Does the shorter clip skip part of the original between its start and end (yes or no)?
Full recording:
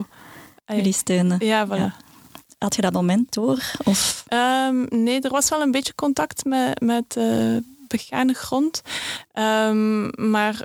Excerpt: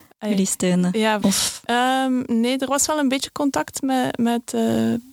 yes